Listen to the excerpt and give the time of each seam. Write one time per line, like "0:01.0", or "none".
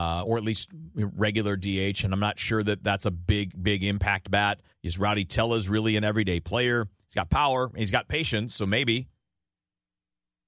0:04.7